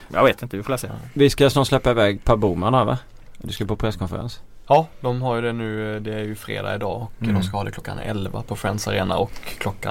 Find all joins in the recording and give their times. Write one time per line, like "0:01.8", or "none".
0:02.2